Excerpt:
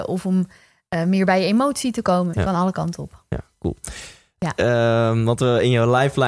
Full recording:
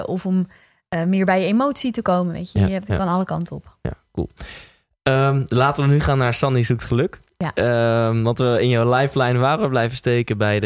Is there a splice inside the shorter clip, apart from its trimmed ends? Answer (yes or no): yes